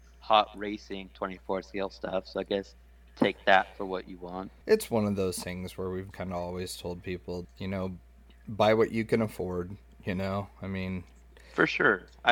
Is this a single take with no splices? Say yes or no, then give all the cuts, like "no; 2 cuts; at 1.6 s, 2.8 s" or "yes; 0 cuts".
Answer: no; 3 cuts; at 4.6 s, 6.1 s, 7.4 s